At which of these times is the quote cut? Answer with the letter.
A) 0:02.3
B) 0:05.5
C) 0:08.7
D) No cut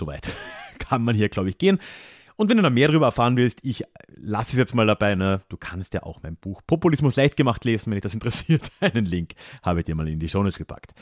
D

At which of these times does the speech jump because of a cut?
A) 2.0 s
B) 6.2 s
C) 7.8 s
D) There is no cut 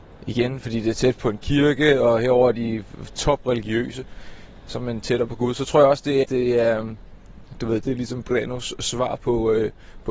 B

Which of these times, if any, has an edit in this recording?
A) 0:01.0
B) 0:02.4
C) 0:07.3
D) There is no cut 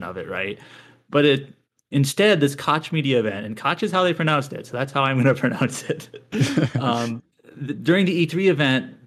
C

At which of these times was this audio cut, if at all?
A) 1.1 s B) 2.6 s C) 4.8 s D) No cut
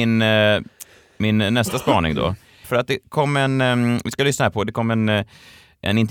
B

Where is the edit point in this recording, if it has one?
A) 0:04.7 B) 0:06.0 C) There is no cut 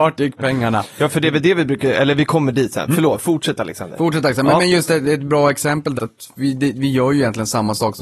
B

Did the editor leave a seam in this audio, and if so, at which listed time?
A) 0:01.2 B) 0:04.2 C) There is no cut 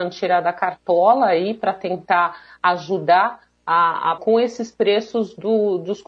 B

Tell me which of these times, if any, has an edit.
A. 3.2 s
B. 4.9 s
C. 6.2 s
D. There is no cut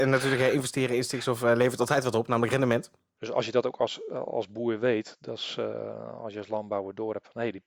A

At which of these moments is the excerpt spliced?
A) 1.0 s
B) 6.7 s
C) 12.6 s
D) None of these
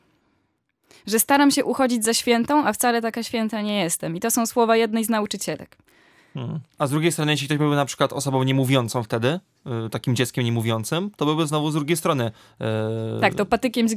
B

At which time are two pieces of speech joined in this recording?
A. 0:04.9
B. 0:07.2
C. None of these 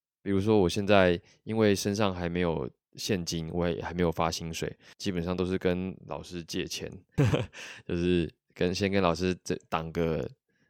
B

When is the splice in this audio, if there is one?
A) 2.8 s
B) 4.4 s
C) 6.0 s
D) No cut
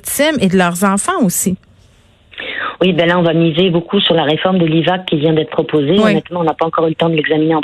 D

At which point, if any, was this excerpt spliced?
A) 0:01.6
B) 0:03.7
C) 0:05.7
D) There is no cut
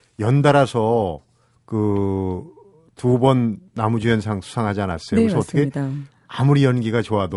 B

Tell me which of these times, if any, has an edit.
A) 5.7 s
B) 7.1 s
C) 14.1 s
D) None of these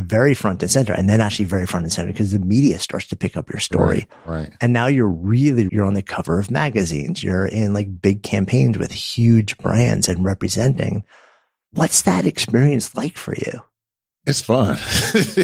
A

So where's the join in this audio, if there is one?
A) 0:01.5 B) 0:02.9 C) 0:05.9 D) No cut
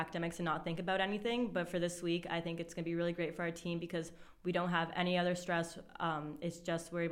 D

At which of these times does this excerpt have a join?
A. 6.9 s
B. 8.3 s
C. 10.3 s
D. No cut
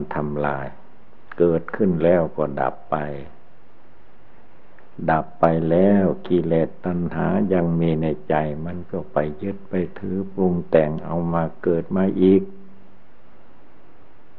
C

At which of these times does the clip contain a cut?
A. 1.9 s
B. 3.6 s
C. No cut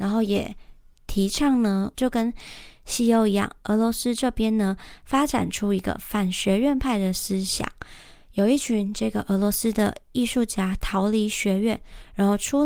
A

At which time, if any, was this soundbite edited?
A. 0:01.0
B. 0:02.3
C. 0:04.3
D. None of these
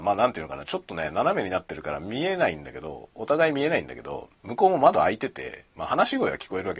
C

